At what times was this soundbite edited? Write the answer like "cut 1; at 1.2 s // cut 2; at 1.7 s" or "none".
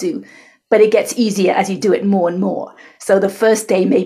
none

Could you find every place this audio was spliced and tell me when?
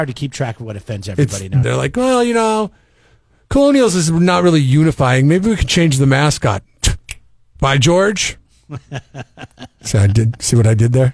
cut 1; at 1.6 s

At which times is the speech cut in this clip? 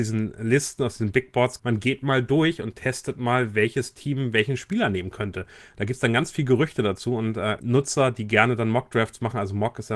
cut 1; at 1.6 s // cut 2; at 7.6 s

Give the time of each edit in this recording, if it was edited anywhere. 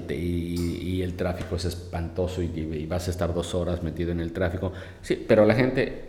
none

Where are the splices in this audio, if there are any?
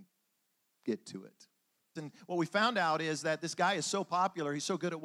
cut 1; at 2.0 s

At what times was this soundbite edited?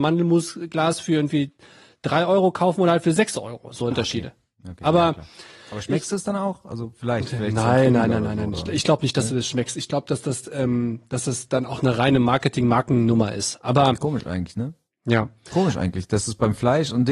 cut 1; at 3.9 s

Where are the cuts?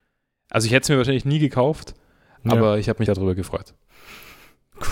cut 1; at 3.1 s

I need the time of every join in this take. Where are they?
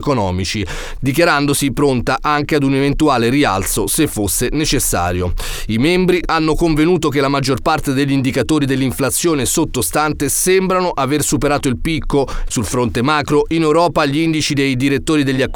cut 1; at 6.2 s // cut 2; at 12.5 s

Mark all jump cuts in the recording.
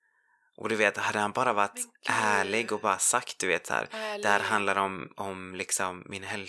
none

